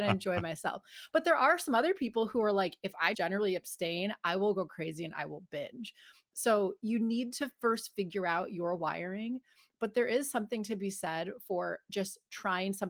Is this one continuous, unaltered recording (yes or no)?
no